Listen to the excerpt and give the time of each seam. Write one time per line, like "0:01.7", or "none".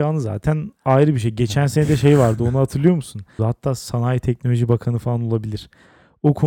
0:03.4